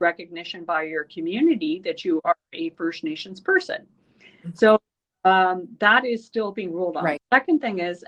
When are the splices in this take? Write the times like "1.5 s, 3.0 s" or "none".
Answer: 7.2 s